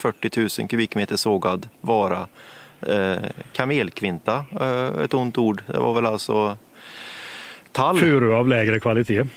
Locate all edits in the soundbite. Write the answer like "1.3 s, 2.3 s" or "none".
none